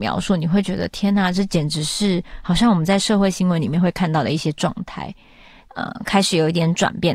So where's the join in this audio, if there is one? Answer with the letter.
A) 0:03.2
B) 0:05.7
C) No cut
B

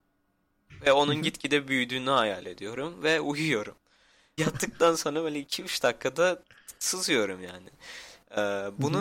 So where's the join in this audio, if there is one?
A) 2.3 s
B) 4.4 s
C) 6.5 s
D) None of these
B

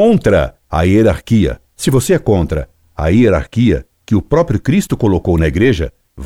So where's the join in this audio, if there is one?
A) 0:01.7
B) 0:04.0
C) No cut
A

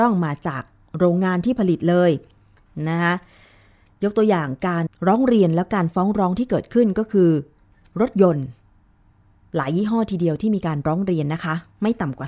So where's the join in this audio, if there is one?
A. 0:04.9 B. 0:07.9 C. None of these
A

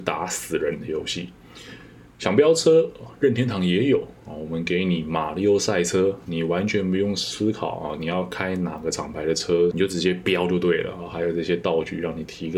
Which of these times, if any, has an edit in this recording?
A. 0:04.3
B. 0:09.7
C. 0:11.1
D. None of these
B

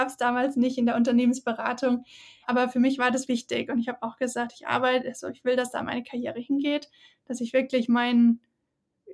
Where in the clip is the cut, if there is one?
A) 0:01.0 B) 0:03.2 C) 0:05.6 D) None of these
B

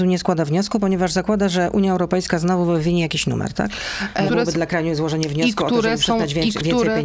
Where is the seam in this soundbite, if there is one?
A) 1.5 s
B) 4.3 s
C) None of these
B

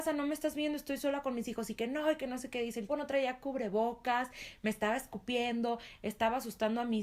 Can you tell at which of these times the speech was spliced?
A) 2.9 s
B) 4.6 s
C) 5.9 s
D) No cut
A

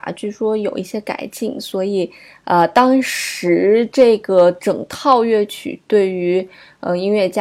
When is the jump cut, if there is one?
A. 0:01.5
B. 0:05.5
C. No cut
C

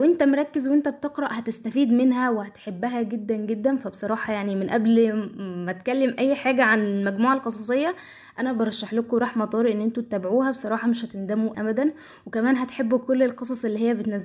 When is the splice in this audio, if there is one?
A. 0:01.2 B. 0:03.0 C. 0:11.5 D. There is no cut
C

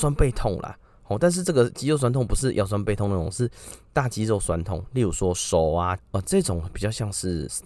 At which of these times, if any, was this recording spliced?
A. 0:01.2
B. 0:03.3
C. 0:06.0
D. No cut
C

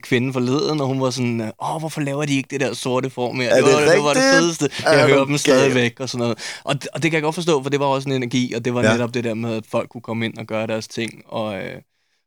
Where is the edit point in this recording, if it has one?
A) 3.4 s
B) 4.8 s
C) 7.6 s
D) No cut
D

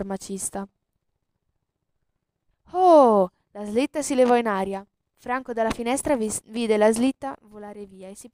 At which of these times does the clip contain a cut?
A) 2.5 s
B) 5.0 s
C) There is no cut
A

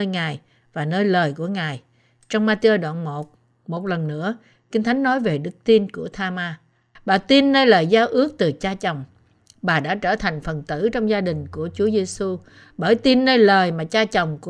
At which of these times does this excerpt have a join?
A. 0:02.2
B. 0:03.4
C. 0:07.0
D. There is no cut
C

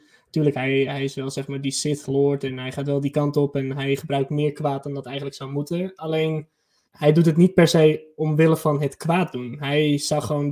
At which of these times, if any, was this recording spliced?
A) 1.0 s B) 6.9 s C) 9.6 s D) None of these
B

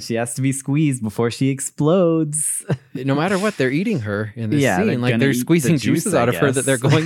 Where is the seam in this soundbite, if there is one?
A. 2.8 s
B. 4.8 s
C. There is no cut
C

